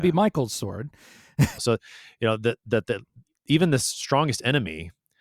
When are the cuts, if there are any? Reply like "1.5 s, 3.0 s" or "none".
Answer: 1.6 s